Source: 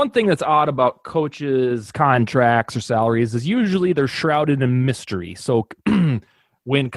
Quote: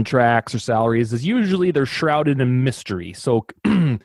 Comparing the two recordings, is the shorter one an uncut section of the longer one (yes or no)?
yes